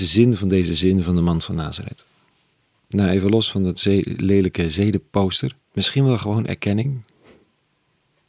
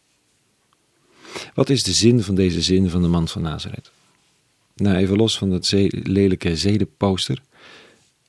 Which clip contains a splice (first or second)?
first